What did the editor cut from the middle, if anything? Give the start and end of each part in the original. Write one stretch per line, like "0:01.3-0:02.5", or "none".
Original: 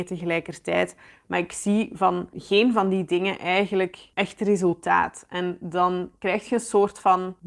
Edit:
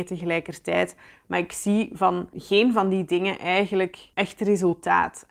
none